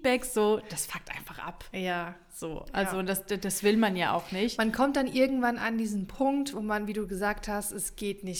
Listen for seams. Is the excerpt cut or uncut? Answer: uncut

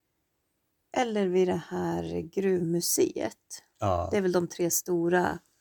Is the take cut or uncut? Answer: uncut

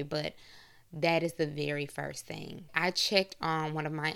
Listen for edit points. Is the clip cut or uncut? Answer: cut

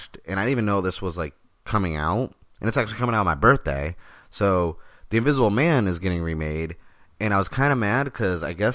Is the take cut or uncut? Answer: uncut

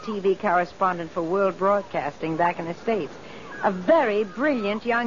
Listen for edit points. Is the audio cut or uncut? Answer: uncut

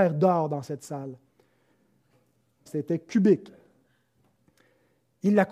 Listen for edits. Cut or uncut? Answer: cut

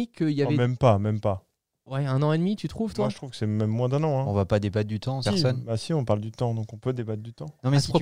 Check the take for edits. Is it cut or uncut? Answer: cut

